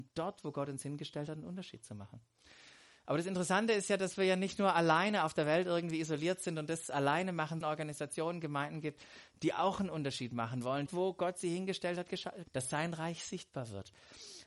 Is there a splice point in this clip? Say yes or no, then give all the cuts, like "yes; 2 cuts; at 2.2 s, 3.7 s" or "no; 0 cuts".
yes; 3 cuts; at 7.6 s, 10.9 s, 12.5 s